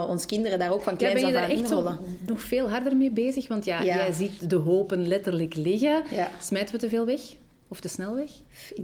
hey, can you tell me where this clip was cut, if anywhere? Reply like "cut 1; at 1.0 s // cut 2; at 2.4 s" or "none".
none

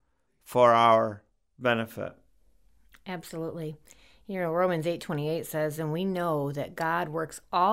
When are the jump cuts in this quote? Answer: none

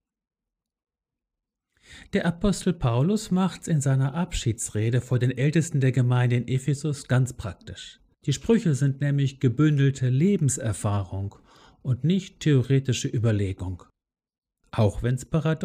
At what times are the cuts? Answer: cut 1; at 8.1 s

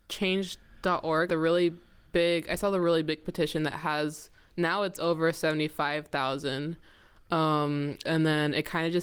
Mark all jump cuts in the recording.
cut 1; at 1.3 s // cut 2; at 8.0 s

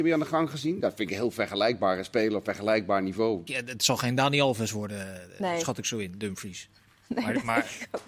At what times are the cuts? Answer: cut 1; at 3.5 s

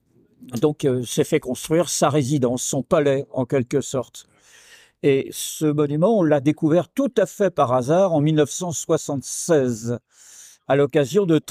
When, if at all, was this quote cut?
none

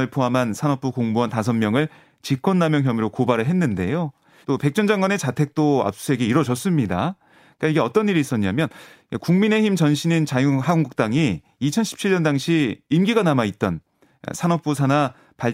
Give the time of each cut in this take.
cut 1; at 4.4 s

